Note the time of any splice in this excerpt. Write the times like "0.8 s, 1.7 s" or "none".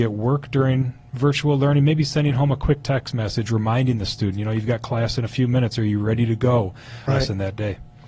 7.1 s